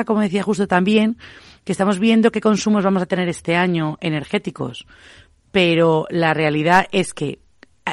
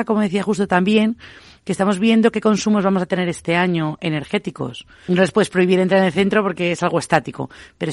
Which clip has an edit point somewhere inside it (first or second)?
second